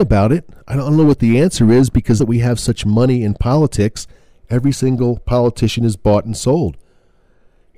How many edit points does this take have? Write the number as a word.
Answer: one